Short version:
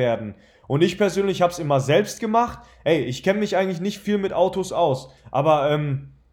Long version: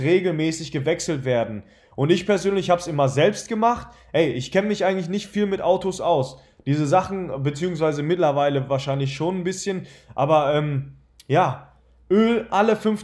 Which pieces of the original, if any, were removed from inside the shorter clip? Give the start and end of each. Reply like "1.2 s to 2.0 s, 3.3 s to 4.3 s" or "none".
6.5 s to 10.0 s